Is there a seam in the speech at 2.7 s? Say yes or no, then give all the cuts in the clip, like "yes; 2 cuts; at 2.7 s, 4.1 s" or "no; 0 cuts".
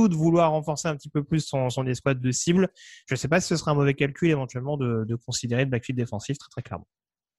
no; 0 cuts